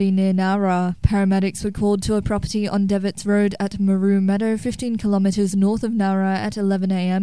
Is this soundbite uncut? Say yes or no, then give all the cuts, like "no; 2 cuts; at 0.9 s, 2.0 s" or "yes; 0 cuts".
yes; 0 cuts